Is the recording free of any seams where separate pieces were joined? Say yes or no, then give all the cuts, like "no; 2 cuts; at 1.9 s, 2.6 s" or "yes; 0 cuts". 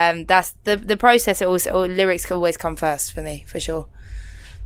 yes; 0 cuts